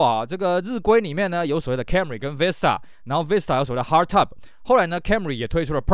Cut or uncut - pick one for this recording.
uncut